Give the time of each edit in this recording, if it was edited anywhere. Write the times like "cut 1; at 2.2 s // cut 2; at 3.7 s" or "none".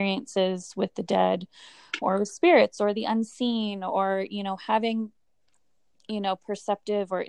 cut 1; at 2.0 s